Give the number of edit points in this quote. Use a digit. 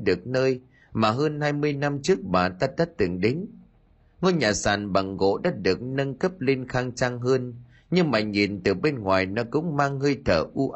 0